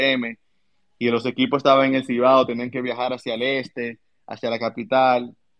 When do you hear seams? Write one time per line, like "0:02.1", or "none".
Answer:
none